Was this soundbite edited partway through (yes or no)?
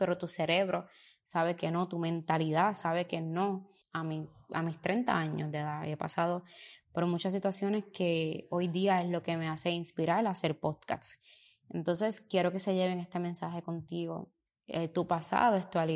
yes